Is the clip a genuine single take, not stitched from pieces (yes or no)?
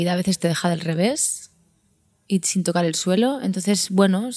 yes